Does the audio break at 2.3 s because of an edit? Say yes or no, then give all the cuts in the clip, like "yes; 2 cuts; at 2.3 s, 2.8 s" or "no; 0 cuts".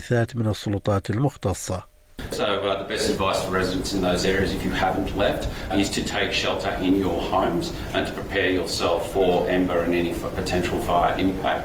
yes; 2 cuts; at 2.3 s, 5.7 s